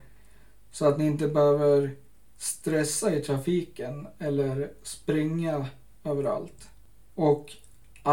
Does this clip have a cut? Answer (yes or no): no